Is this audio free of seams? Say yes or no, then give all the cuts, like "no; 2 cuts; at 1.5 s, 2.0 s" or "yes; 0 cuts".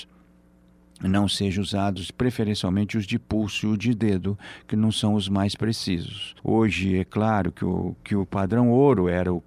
no; 1 cut; at 6.4 s